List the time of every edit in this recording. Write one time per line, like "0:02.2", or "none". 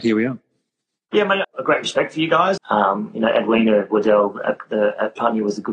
0:01.4
0:02.6